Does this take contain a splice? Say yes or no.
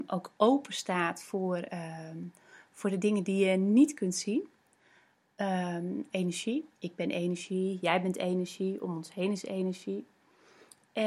yes